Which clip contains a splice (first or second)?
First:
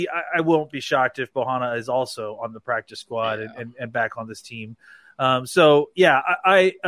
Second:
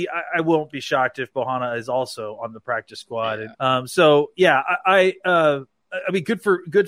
second